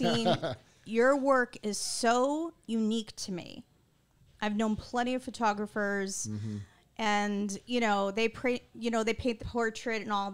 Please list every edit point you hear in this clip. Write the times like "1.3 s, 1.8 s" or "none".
9.4 s